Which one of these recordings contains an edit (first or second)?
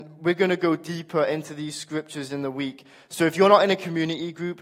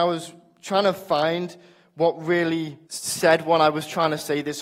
second